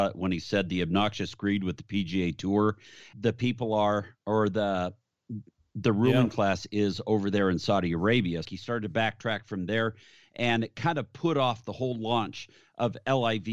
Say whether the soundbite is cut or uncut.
cut